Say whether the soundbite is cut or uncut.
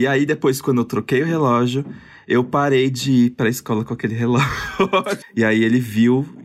cut